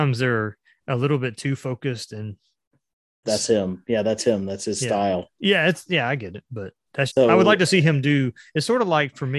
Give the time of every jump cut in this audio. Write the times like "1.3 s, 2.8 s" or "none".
3.2 s, 7.1 s